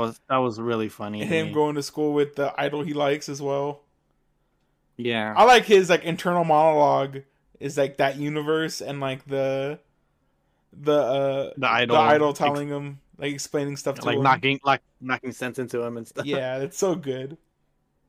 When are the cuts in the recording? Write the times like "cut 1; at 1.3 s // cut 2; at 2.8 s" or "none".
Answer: cut 1; at 11.5 s